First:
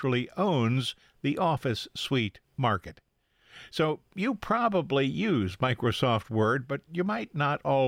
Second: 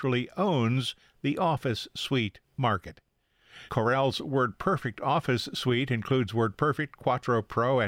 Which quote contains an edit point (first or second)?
second